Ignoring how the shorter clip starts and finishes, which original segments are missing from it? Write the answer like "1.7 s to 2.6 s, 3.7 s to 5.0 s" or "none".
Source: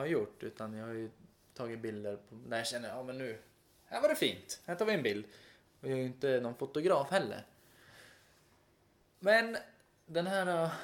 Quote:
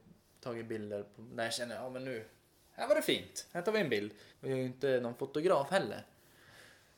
5.4 s to 5.7 s